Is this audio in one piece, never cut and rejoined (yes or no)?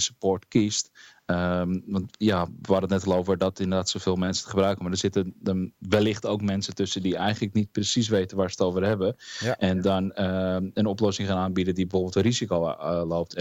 yes